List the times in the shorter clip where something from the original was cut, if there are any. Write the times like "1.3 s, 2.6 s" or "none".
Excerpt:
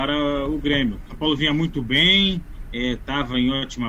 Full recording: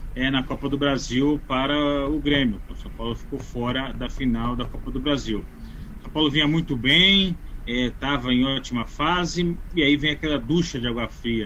1.1 s